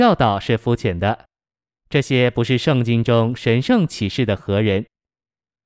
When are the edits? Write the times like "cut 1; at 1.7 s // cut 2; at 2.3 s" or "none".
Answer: none

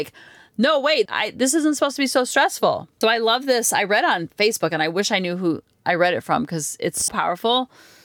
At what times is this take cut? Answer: cut 1; at 1.1 s // cut 2; at 3.0 s // cut 3; at 7.1 s

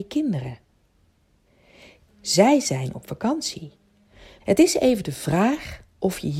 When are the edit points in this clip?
cut 1; at 2.1 s // cut 2; at 4.4 s

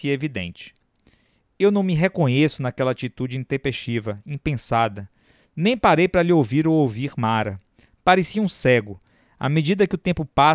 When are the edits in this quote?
none

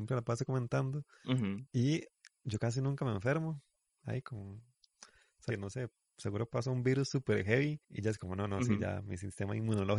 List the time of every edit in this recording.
cut 1; at 5.5 s // cut 2; at 7.8 s

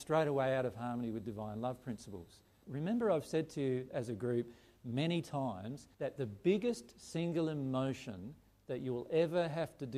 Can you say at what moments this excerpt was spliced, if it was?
cut 1; at 2.6 s // cut 2; at 5.9 s

